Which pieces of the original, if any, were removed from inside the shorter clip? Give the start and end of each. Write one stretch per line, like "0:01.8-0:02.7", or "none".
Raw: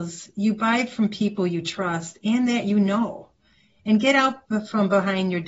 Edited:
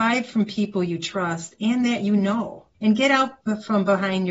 0:03.4-0:03.8